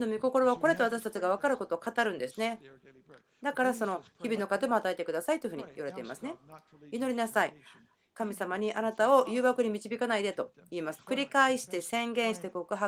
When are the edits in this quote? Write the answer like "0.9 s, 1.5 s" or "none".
11.0 s